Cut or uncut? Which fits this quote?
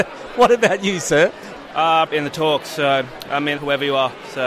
cut